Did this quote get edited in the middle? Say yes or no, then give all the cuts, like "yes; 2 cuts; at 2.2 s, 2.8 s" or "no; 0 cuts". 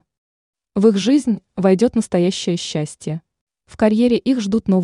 yes; 1 cut; at 3.5 s